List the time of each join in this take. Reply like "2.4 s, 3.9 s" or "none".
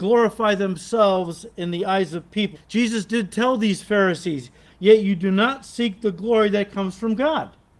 2.5 s, 4.7 s